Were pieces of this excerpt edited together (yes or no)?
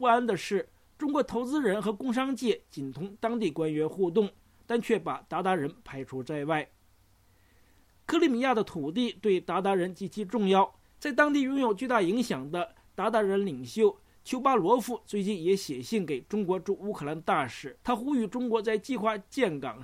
yes